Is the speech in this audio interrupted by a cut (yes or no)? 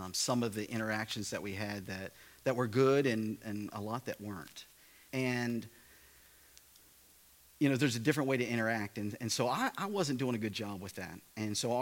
yes